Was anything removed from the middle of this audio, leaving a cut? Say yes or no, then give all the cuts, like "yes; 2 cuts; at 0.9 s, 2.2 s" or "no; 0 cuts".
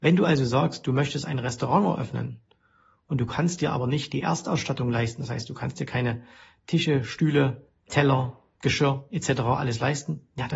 no; 0 cuts